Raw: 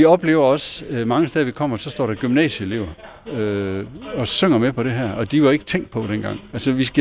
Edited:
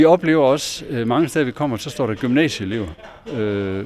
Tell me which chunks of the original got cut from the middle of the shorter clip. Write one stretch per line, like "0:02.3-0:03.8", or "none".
none